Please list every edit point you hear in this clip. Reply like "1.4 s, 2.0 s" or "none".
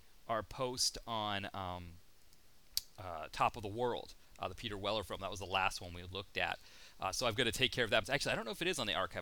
8.0 s